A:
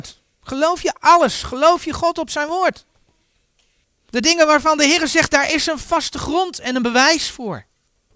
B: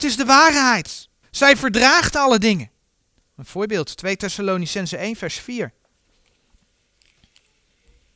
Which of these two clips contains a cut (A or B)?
B